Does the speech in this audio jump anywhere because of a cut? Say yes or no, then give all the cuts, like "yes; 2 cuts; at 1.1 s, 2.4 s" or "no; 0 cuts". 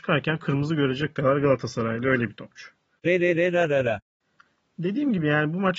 no; 0 cuts